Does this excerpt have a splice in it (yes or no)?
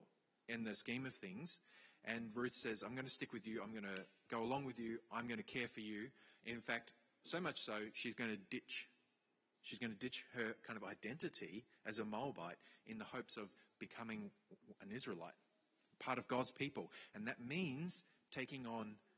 no